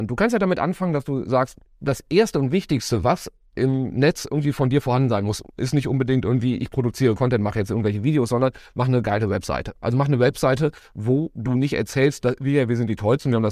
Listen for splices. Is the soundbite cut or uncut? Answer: uncut